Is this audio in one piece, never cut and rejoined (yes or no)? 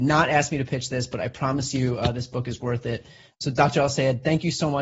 yes